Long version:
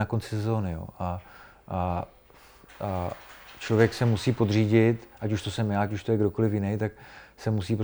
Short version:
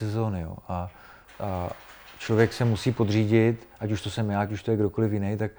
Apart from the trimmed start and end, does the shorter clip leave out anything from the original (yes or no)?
yes